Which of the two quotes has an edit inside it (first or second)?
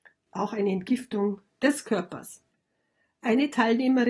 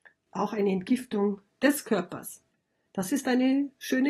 second